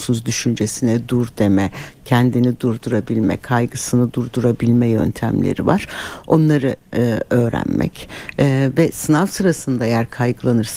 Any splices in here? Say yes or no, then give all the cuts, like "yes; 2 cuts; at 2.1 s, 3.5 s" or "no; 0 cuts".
no; 0 cuts